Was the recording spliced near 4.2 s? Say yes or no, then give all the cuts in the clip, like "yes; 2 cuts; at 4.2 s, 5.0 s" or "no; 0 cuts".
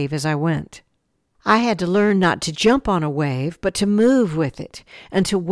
no; 2 cuts; at 1.3 s, 2.5 s